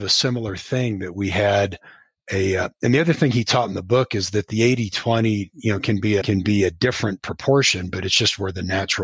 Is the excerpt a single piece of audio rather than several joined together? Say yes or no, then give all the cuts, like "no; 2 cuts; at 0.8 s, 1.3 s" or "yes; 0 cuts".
yes; 0 cuts